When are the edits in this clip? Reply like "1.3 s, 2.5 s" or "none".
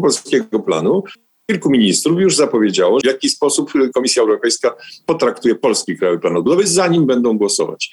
3.0 s